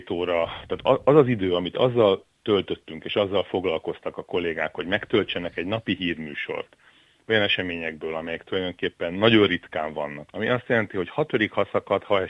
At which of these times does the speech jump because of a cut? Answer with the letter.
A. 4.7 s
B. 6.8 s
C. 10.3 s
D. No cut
C